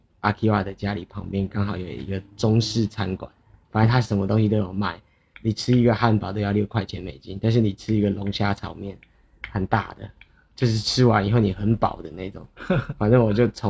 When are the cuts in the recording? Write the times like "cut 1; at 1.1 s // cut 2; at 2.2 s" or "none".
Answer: cut 1; at 5.3 s